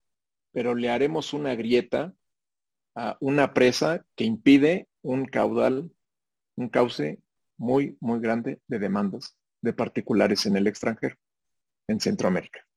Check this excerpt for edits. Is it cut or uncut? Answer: cut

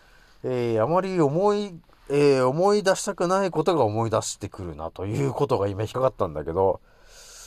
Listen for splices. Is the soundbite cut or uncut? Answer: cut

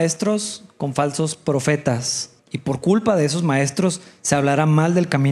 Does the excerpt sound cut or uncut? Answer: cut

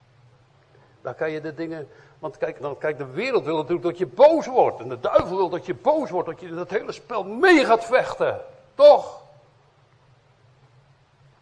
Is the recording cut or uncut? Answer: cut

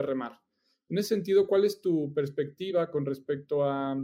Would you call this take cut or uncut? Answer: uncut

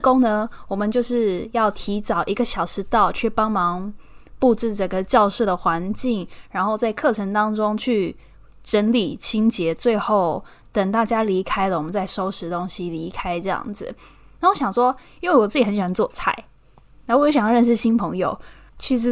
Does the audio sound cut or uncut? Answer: uncut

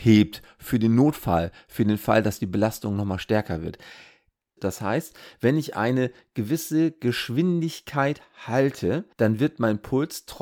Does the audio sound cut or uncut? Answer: cut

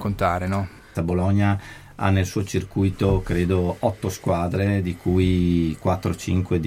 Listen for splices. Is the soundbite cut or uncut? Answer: cut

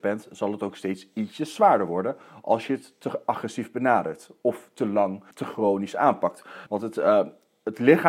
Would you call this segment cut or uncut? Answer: cut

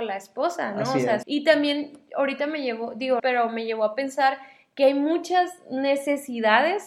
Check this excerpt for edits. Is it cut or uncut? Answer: cut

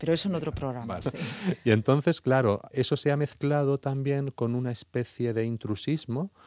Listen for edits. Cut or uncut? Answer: cut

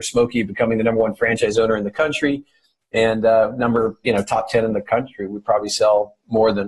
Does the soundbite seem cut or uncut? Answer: uncut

